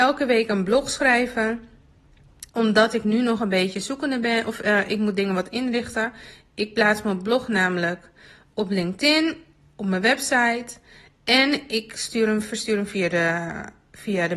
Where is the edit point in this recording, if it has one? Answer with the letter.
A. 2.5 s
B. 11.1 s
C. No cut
A